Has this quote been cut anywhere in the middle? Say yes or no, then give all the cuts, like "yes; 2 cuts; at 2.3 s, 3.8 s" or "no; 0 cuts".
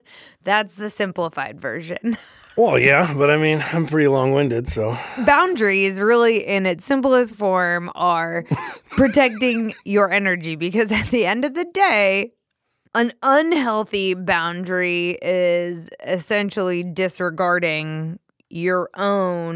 no; 0 cuts